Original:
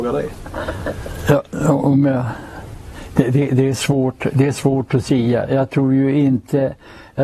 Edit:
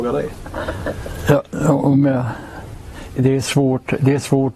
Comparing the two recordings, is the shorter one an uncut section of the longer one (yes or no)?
no